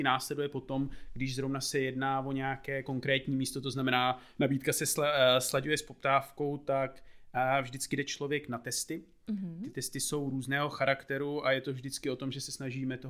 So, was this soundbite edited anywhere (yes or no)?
no